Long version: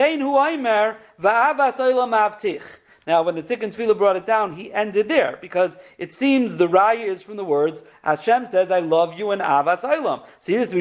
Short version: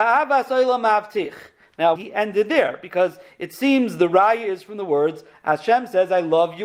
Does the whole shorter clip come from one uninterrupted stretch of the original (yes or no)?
no